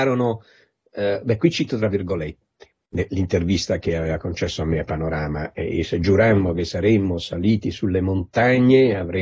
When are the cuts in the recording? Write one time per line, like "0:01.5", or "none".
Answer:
0:02.7